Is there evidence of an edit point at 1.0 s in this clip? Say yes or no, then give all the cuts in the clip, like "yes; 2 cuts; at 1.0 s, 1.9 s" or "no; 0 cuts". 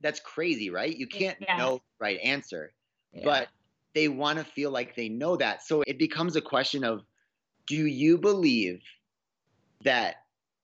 no; 1 cut; at 5.8 s